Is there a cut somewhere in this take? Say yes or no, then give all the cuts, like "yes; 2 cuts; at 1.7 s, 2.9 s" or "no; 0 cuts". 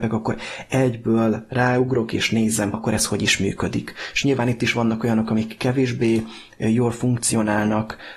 yes; 1 cut; at 2.7 s